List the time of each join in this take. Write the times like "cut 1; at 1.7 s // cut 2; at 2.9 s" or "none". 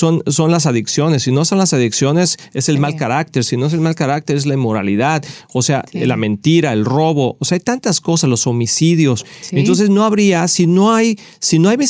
none